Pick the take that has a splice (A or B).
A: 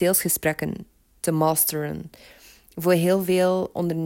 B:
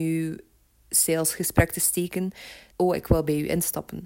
B